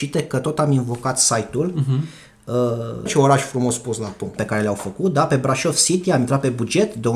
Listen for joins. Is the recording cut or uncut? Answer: cut